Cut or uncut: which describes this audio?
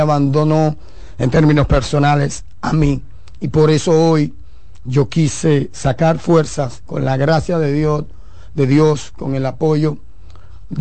cut